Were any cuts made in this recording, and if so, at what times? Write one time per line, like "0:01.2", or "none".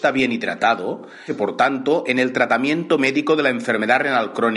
0:01.3